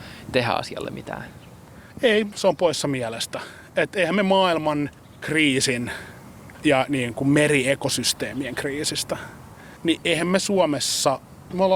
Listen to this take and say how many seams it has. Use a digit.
1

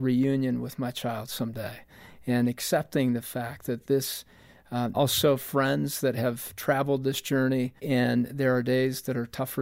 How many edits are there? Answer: 2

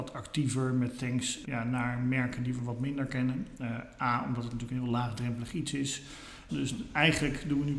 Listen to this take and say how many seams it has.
2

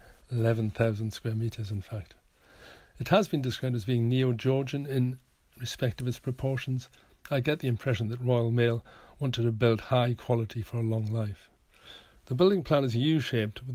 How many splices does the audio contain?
0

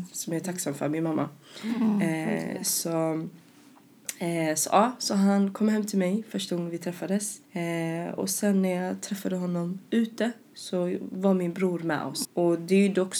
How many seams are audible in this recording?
2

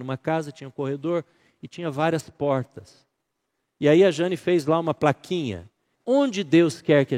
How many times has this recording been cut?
1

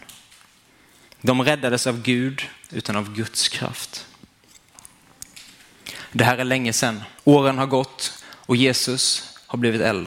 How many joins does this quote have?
2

